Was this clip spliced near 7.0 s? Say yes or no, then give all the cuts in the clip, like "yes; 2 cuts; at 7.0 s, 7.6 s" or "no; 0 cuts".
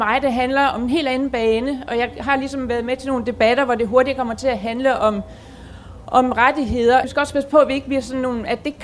yes; 1 cut; at 7.0 s